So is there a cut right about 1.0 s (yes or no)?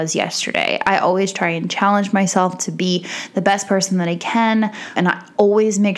no